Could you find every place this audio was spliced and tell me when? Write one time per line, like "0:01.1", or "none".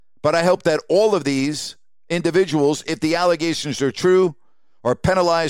none